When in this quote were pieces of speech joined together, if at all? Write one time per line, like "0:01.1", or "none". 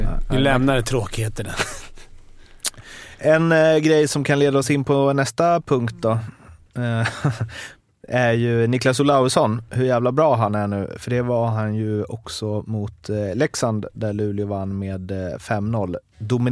none